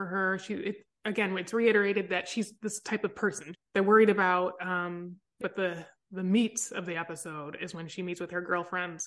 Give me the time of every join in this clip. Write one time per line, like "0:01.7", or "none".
0:03.5
0:05.4